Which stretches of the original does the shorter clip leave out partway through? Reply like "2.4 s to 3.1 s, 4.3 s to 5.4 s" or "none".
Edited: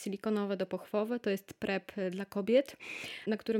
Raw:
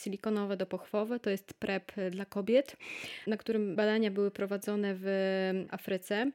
none